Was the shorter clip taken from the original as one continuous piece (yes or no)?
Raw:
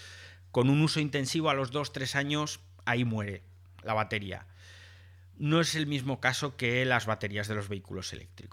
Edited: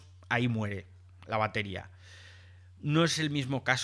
yes